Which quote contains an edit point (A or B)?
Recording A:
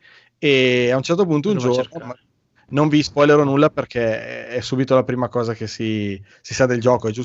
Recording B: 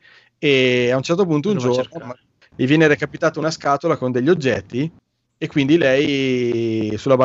B